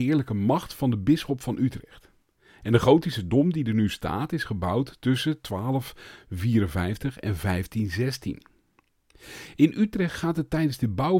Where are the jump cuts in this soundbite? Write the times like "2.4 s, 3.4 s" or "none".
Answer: none